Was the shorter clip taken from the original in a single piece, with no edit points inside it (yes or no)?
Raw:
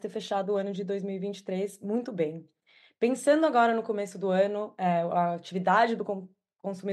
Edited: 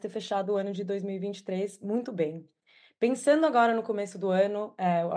yes